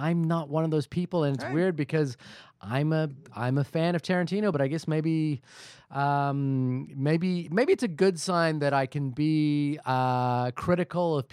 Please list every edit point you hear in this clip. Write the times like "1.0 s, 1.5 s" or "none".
none